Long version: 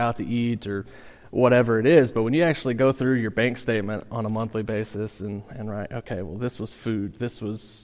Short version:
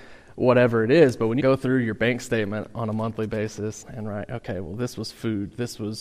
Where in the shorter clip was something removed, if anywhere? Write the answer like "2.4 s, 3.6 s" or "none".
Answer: 1.4 s, 3.8 s